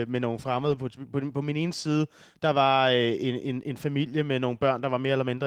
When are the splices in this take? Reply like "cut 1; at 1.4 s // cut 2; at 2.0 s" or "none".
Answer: none